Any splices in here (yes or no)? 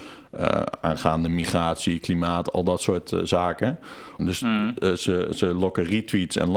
yes